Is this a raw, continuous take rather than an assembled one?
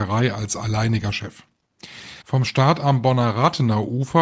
no; 1 cut; at 2.2 s

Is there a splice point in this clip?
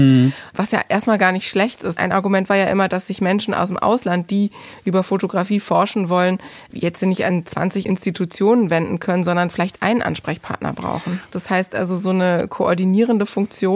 yes; 2 cuts; at 2.0 s, 11.3 s

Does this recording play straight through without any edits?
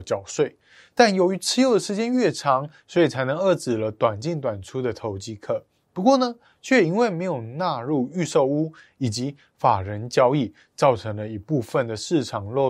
no; 1 cut; at 2.8 s

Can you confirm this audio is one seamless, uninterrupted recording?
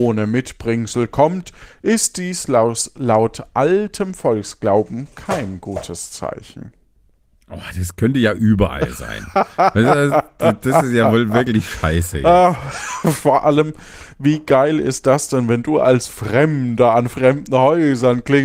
yes; 0 cuts

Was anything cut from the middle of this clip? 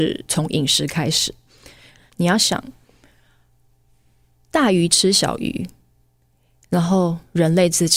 yes; 1 cut; at 2.1 s

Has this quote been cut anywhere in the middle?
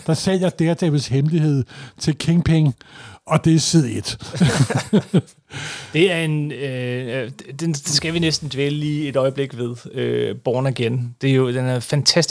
no; 0 cuts

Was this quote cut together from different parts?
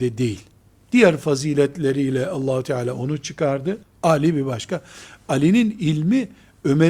yes; 1 cut; at 3.8 s

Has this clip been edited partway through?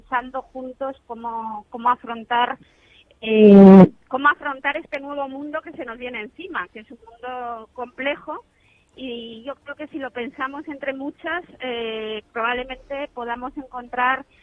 no; 0 cuts

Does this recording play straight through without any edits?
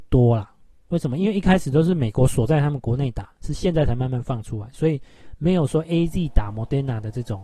yes; 0 cuts

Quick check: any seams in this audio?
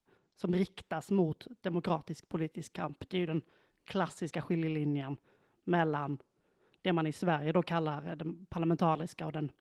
no; 0 cuts

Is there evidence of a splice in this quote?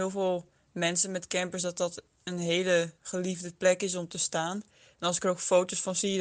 no; 0 cuts

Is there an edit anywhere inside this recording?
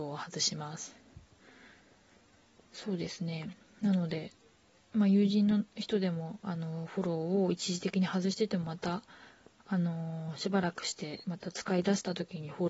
no; 0 cuts

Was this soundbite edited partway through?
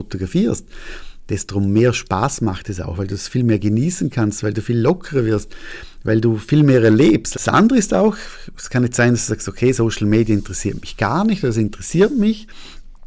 yes; 1 cut; at 7.3 s

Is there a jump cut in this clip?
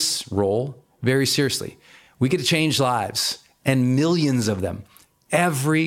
no; 0 cuts

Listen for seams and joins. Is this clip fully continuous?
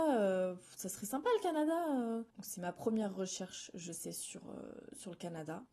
no; 1 cut; at 2.3 s

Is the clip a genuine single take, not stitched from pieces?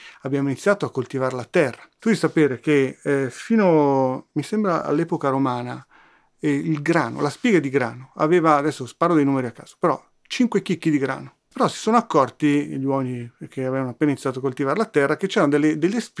yes; 0 cuts

